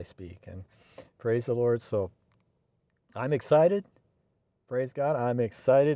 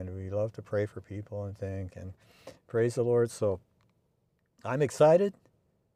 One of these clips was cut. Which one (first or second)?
second